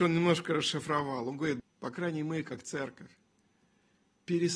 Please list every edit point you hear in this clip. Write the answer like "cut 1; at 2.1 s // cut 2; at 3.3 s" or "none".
cut 1; at 1.6 s